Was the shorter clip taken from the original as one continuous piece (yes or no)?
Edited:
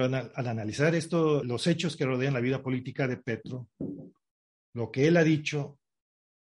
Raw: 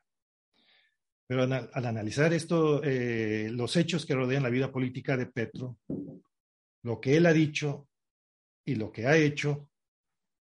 no